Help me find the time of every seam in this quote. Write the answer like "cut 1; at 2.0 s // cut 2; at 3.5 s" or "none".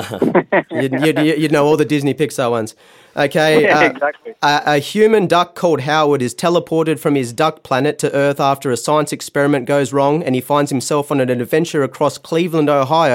none